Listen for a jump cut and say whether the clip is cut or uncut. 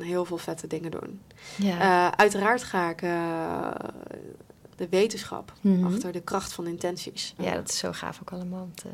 cut